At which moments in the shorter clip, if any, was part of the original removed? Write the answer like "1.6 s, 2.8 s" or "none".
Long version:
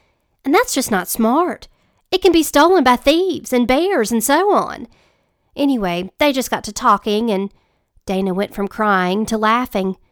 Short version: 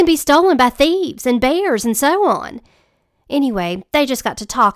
none